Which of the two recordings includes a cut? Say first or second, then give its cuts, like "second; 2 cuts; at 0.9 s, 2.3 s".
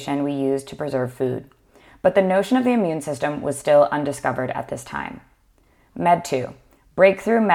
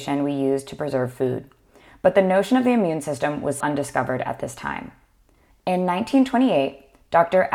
second; 2 cuts; at 3.6 s, 5.5 s